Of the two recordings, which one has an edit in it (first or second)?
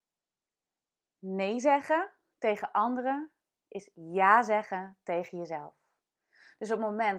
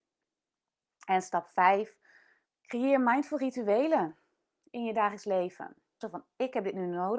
second